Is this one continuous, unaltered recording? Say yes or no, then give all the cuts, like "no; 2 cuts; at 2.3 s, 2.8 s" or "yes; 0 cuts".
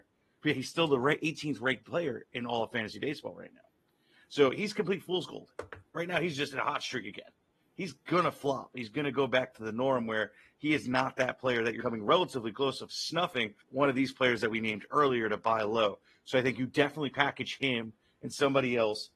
no; 2 cuts; at 11.8 s, 13.6 s